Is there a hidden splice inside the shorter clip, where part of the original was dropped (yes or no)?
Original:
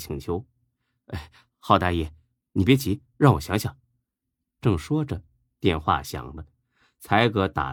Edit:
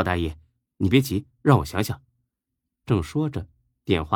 no